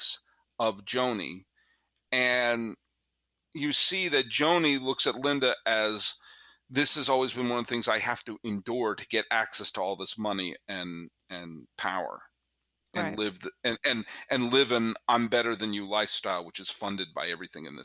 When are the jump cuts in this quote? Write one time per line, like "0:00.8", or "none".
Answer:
none